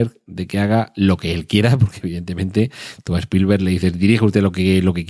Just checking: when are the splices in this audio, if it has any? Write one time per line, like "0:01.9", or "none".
none